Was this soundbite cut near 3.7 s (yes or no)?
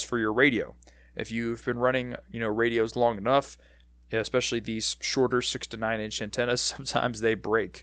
no